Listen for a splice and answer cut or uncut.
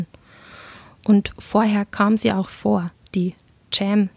cut